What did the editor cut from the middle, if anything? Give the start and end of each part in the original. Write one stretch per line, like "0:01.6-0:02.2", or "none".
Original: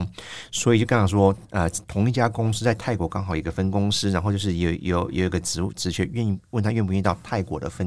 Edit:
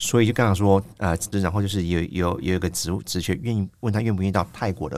0:01.8-0:04.0

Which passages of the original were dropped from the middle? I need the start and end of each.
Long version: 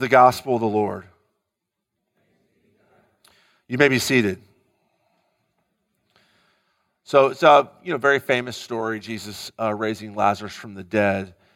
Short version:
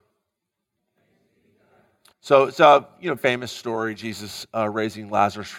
0:03.3-0:06.9
0:08.0-0:08.2

